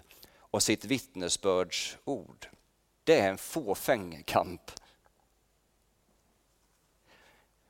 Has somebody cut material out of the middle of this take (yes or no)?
yes